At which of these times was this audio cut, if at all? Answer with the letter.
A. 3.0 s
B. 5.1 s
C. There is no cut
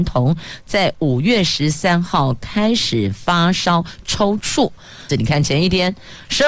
B